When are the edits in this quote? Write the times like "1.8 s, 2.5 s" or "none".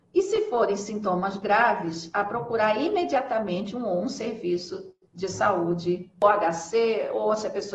5.0 s